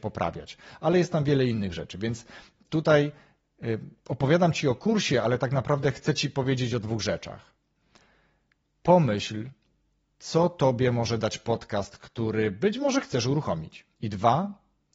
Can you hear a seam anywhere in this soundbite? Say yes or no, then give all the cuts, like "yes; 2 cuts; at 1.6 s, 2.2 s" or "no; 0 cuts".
yes; 1 cut; at 13.9 s